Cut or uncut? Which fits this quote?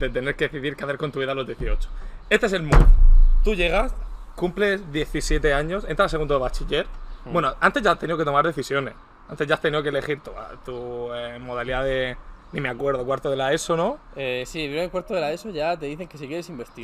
uncut